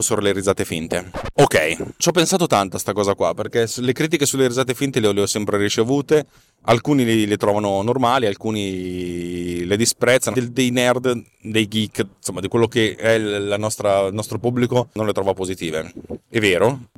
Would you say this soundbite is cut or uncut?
cut